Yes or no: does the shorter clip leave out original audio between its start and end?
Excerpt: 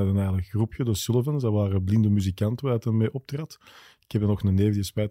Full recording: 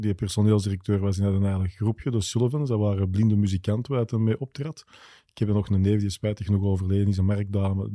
no